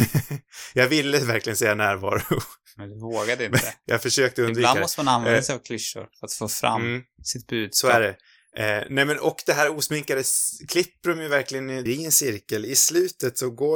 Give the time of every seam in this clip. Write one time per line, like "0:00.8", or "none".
0:11.9